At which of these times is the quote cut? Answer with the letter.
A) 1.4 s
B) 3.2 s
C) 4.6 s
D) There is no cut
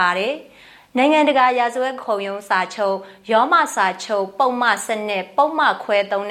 D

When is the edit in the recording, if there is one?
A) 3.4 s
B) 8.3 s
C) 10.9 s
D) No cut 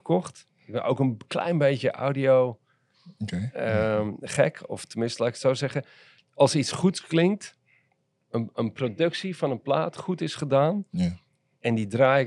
D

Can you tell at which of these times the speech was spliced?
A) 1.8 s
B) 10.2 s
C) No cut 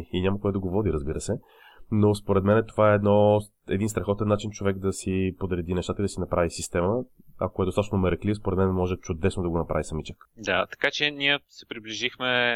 B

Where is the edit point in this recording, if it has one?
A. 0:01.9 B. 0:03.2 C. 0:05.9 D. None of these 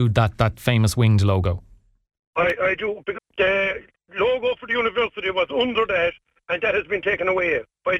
B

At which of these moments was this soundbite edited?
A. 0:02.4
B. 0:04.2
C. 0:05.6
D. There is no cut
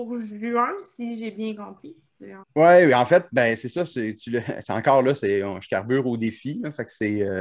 A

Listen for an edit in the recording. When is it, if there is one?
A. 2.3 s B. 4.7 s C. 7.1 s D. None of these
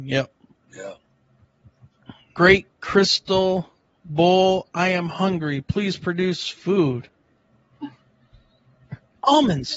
A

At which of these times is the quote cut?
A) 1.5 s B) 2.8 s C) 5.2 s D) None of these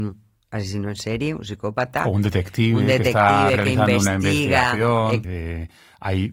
C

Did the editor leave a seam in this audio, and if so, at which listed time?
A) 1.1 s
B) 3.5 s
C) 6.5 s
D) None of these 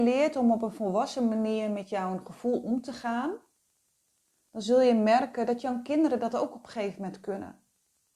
D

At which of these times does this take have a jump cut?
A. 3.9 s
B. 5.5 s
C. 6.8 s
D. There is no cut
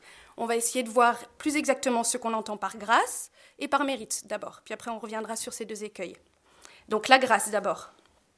D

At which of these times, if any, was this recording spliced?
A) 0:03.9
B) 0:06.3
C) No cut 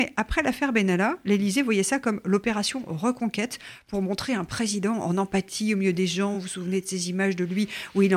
C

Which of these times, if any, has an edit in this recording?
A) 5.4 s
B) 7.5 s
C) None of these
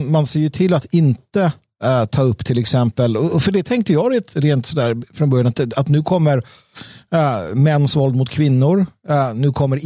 C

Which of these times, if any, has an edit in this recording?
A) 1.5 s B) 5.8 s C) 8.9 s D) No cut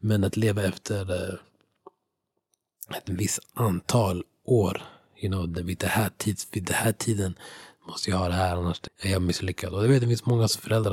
C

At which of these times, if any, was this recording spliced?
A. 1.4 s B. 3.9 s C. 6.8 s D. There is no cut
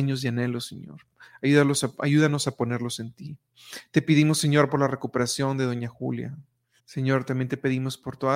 C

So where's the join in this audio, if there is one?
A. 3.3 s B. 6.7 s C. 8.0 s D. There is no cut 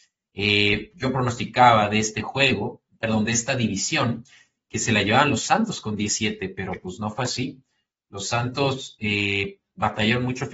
D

